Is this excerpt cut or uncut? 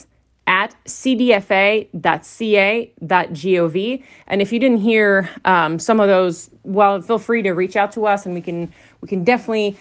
uncut